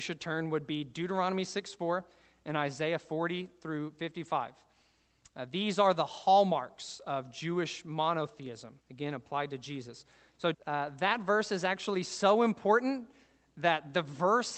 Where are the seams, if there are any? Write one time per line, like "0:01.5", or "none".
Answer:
0:08.8
0:10.5

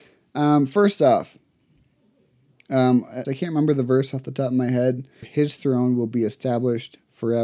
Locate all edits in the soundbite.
0:03.2
0:05.2

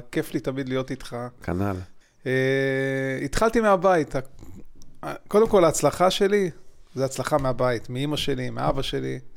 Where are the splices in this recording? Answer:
0:02.0

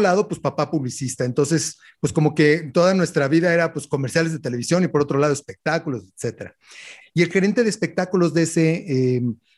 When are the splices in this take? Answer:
0:07.0

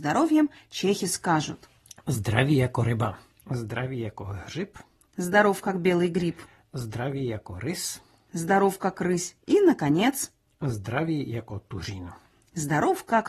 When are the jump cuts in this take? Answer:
0:03.4

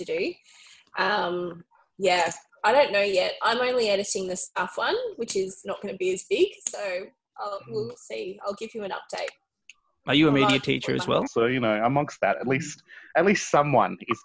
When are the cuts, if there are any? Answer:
0:11.3

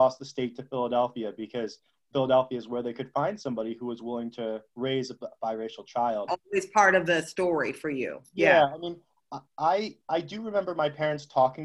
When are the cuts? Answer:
0:06.3

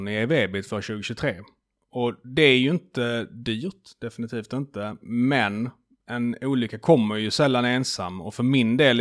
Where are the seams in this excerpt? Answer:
none

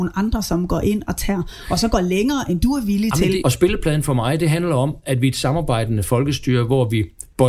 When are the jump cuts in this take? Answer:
0:03.4

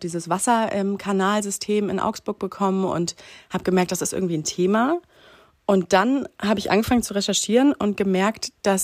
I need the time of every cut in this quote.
none

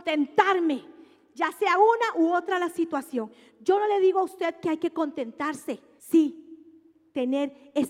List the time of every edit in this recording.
0:06.0

